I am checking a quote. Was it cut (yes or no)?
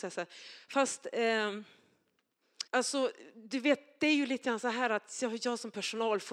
yes